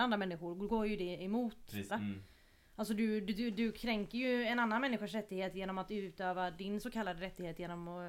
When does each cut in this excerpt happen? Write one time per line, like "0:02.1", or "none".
0:01.9